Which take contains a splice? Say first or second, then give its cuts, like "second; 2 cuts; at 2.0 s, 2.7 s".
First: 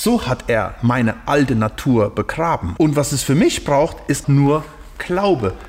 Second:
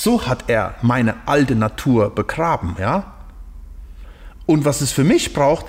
first; 2 cuts; at 2.8 s, 4.2 s